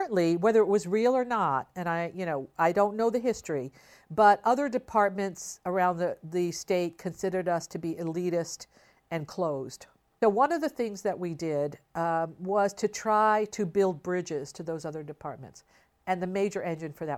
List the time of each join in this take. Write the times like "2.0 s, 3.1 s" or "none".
10.2 s